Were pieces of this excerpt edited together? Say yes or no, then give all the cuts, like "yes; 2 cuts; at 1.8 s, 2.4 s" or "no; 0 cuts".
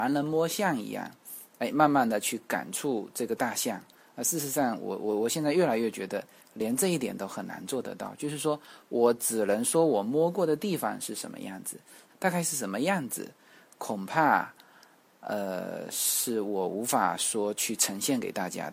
yes; 1 cut; at 12.1 s